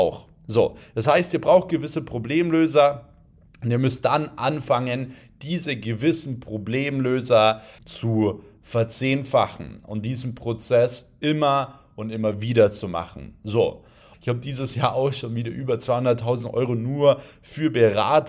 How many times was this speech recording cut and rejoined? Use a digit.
2